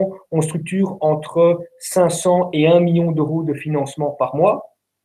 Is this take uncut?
yes; 0 cuts

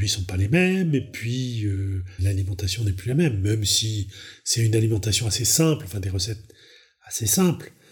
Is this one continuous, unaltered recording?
yes; 0 cuts

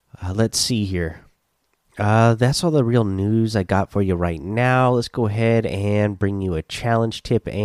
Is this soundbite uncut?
yes; 0 cuts

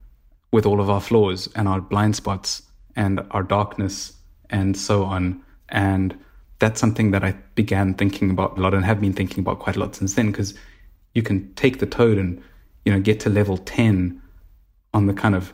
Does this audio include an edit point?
yes; 1 cut; at 8.6 s

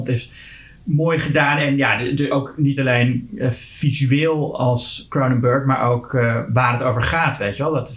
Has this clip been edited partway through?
no; 0 cuts

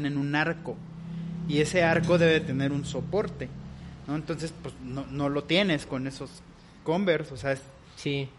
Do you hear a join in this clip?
no; 0 cuts

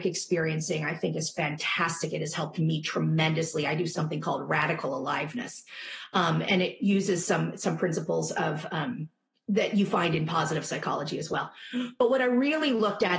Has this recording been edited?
no; 0 cuts

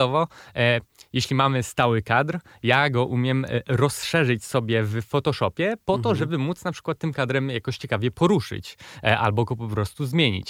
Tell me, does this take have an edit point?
no; 0 cuts

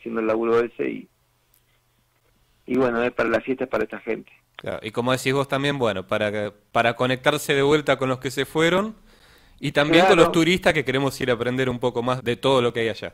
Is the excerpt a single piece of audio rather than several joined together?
no; 1 cut; at 12.2 s

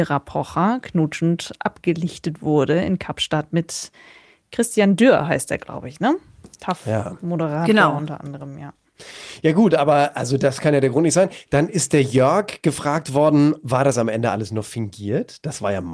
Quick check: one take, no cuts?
yes; 0 cuts

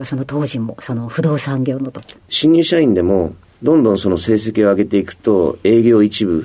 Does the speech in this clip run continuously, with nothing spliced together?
no; 1 cut; at 2.2 s

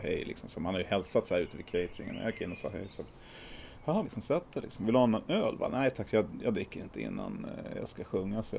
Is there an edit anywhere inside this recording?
yes; 1 cut; at 4.0 s

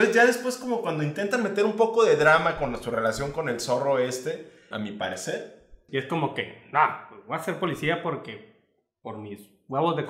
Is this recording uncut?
no; 2 cuts; at 4.7 s, 5.9 s

